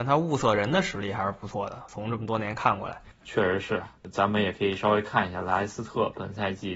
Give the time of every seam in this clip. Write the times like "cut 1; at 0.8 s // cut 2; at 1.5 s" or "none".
none